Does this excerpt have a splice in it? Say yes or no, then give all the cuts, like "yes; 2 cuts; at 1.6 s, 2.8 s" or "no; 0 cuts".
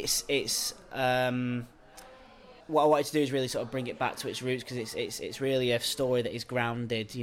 yes; 1 cut; at 2.6 s